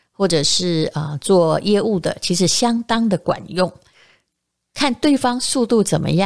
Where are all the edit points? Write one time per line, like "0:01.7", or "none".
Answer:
none